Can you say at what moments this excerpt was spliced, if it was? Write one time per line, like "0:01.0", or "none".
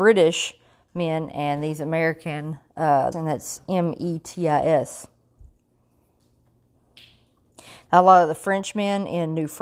0:03.1
0:07.9